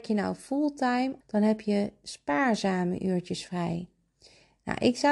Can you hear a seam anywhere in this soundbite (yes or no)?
yes